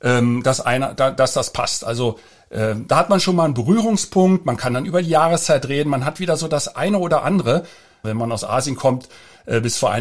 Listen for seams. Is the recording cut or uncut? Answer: cut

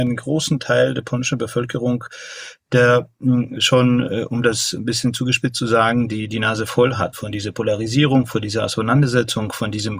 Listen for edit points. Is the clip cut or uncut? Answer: uncut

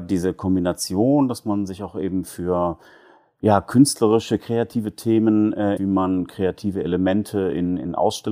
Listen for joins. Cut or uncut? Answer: cut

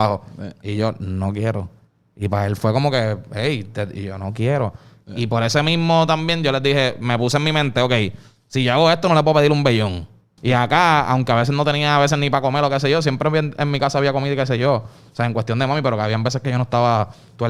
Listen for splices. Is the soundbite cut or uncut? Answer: cut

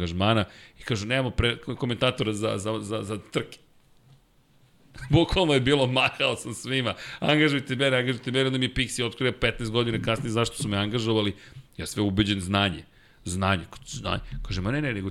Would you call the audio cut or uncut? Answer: uncut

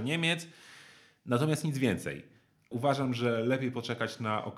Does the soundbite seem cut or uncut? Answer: cut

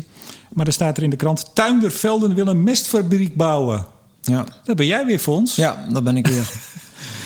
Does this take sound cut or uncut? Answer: uncut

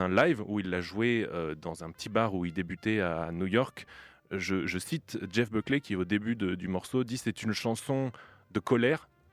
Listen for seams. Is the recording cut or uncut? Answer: uncut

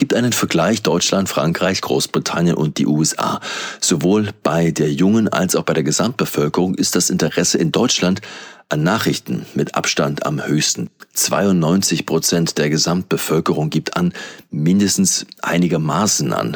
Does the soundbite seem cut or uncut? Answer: uncut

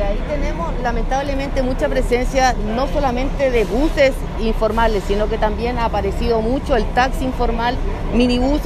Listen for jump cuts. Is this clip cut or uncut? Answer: cut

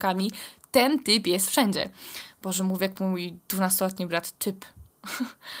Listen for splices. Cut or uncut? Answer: uncut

